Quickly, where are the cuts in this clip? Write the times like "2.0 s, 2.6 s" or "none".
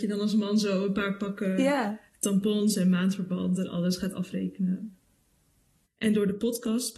5.9 s